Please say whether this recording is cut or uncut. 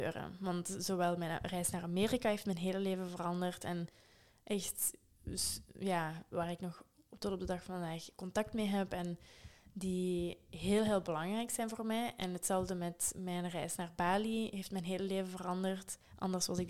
cut